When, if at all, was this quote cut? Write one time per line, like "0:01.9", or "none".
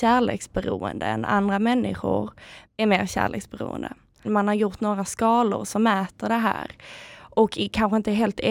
0:02.6
0:04.2